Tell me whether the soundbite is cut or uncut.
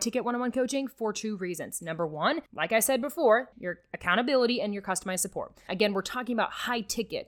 cut